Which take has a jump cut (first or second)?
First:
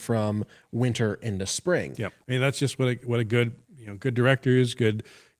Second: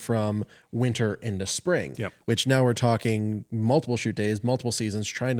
first